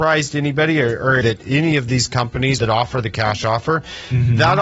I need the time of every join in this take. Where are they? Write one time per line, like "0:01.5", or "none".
0:01.2
0:02.6